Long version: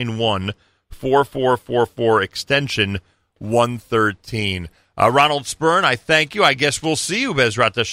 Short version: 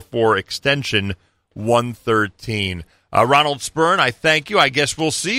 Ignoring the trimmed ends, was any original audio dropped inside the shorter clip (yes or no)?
no